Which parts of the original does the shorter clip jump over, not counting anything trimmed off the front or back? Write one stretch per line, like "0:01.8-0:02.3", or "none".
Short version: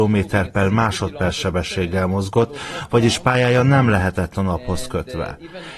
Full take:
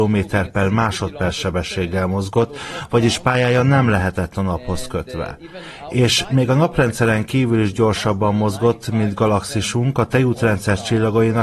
none